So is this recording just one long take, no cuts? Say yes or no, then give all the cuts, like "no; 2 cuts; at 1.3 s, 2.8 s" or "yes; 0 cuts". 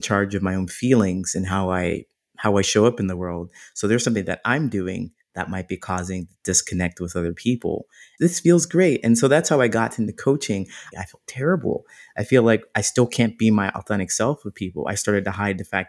no; 2 cuts; at 8.2 s, 10.9 s